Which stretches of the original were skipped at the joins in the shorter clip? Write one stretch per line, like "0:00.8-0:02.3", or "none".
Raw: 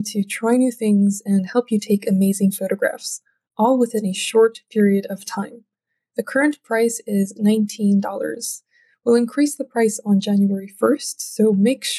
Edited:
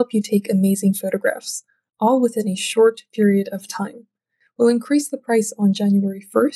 0:06.0-0:08.9